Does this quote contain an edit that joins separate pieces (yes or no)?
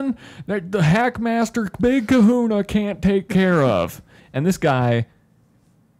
yes